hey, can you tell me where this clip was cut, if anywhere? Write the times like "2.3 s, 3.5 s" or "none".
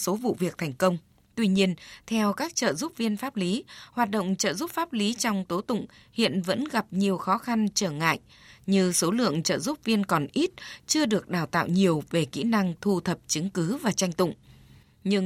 none